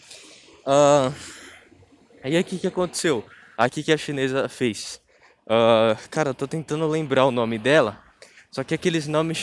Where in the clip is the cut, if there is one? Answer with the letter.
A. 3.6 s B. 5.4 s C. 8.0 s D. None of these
A